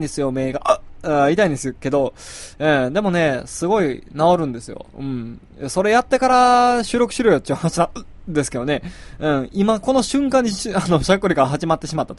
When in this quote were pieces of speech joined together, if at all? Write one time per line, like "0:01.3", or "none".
none